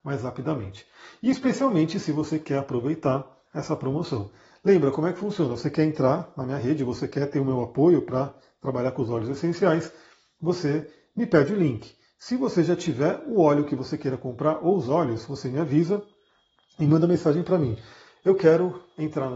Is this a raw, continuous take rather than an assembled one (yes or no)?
yes